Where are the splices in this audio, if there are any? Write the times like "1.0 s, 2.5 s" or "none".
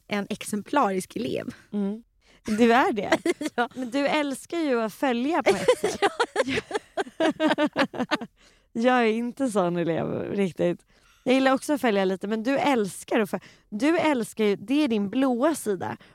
none